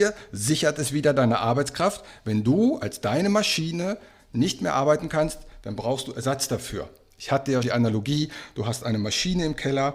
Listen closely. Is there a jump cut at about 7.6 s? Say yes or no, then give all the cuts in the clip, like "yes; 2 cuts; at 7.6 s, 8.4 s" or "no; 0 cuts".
yes; 1 cut; at 7.6 s